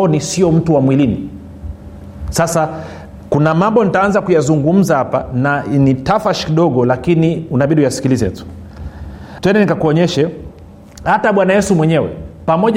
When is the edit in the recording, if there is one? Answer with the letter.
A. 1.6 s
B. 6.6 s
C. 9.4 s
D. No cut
C